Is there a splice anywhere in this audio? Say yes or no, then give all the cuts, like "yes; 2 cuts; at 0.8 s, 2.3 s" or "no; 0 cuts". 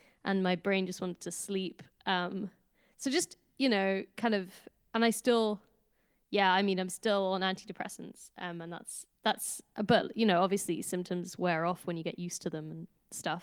yes; 1 cut; at 9.2 s